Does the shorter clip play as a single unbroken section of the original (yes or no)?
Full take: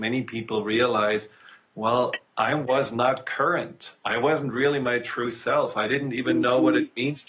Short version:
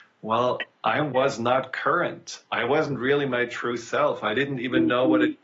yes